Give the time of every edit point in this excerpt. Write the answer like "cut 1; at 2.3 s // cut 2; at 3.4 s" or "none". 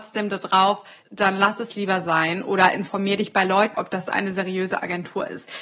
cut 1; at 1.0 s // cut 2; at 3.7 s